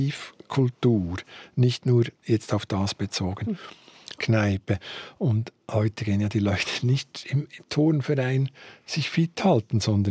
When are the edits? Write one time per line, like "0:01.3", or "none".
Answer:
0:04.2
0:05.6